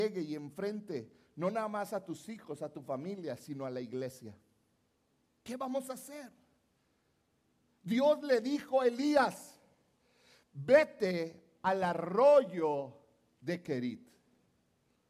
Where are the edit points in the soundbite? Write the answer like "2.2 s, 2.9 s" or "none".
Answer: none